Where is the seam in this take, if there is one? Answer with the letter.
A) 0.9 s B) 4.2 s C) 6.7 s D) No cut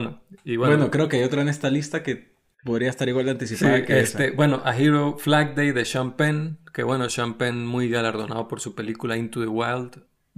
D